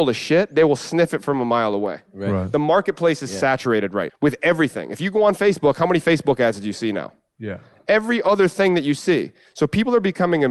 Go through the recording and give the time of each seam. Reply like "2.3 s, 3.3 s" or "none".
4.1 s